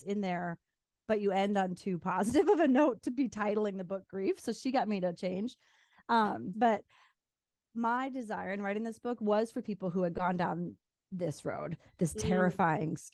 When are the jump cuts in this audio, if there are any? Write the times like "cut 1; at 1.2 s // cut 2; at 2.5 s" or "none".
cut 1; at 6.5 s